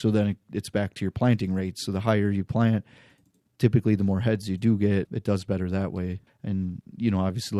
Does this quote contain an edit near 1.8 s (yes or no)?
no